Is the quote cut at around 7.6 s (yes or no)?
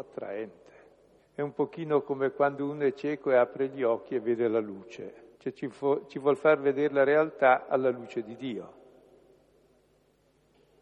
no